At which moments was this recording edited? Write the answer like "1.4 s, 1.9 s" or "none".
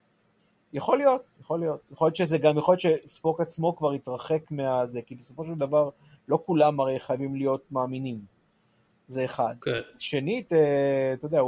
none